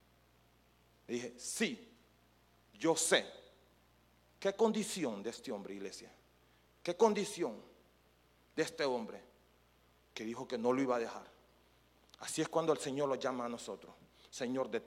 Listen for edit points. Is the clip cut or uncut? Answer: uncut